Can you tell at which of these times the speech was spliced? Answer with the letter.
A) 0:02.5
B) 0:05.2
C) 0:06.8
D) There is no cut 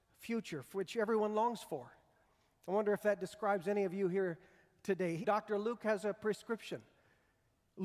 B